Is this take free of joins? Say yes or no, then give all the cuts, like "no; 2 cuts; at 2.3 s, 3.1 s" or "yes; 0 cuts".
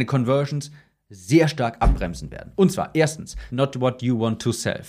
no; 1 cut; at 3.5 s